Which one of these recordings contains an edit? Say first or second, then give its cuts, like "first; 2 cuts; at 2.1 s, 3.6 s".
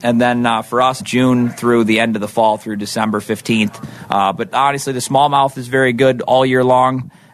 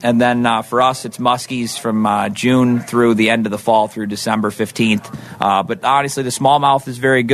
first; 1 cut; at 1.0 s